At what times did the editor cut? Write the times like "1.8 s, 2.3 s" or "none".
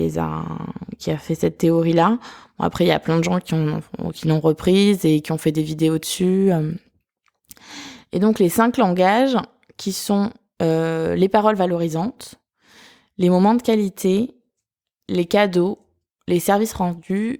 none